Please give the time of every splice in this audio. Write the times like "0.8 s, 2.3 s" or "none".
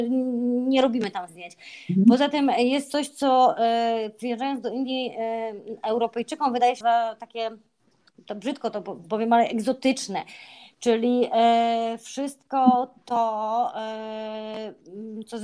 6.8 s